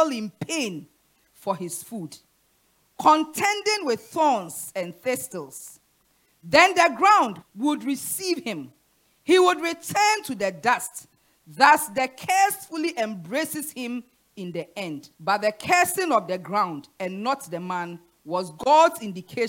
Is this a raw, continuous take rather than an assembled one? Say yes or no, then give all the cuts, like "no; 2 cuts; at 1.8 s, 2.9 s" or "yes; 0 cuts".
no; 2 cuts; at 7.4 s, 15.1 s